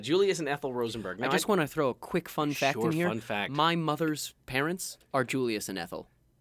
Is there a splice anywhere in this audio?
no; 0 cuts

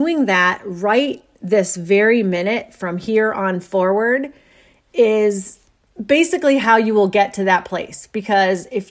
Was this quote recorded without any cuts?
yes; 0 cuts

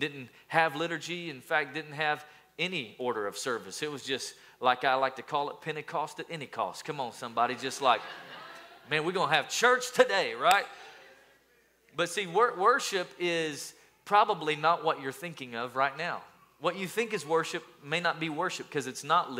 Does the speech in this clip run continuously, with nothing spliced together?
yes; 0 cuts

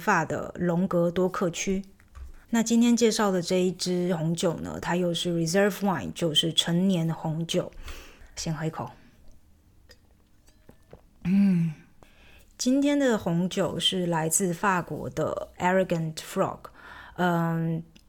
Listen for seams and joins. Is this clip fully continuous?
no; 2 cuts; at 2.4 s, 8.4 s

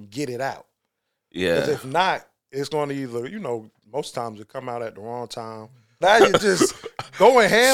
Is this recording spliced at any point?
yes; 1 cut; at 6.0 s

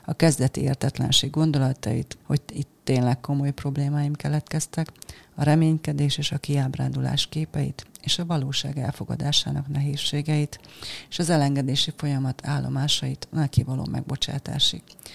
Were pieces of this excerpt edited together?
yes; 1 cut; at 2.2 s

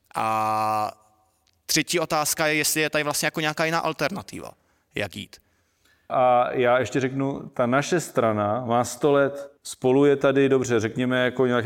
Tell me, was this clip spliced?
yes; 2 cuts; at 6.1 s, 9.6 s

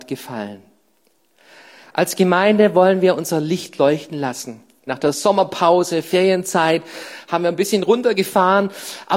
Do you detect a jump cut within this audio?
yes; 1 cut; at 4.9 s

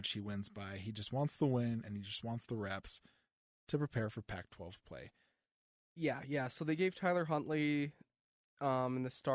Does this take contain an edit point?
no; 0 cuts

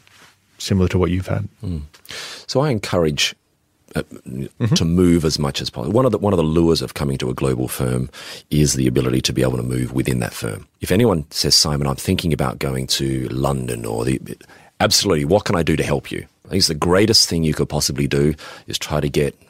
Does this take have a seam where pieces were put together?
yes; 1 cut; at 4.5 s

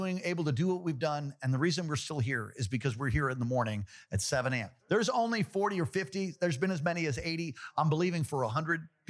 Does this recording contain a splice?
no; 0 cuts

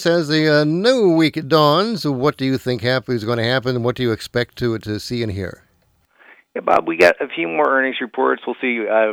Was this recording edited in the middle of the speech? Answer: no; 0 cuts

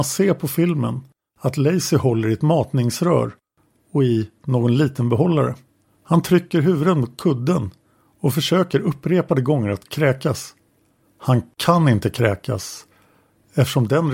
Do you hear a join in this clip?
yes; 1 cut; at 5.8 s

